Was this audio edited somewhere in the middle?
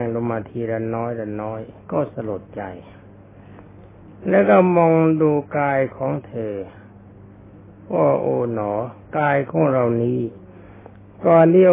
no; 0 cuts

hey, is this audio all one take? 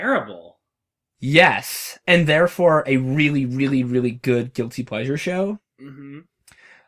yes; 0 cuts

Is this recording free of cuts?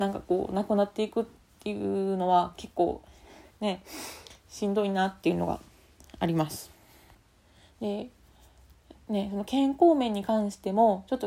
yes; 0 cuts

